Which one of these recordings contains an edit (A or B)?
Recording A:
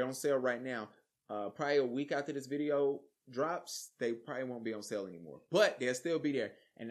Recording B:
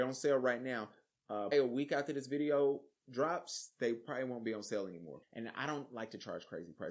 B